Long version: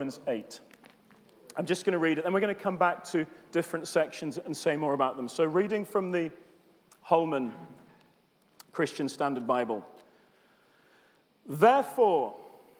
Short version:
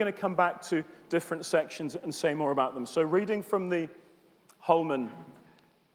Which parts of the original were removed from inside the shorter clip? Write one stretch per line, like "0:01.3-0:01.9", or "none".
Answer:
none